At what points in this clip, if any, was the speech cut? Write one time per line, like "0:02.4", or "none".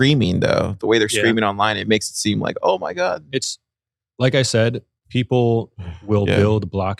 none